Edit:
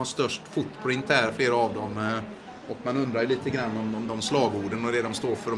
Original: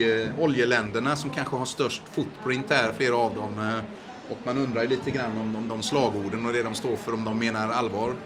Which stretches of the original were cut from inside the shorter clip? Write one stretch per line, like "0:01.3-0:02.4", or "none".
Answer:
none